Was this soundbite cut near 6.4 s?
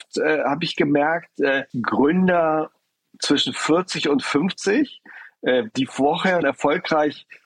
yes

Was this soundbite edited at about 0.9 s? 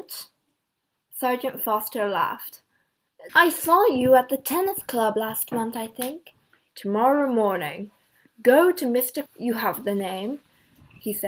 no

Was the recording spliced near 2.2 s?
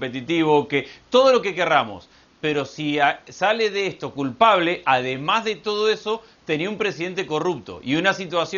no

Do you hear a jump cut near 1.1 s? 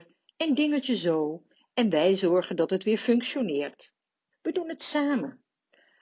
no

